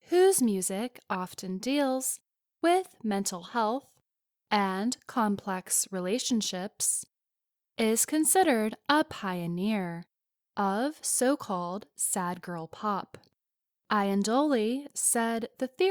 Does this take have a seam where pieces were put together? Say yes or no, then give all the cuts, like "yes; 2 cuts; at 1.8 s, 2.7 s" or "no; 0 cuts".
yes; 1 cut; at 13.7 s